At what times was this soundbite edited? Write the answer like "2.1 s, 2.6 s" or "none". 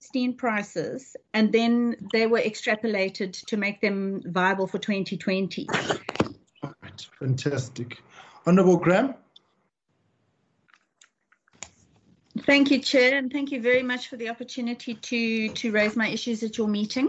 6.5 s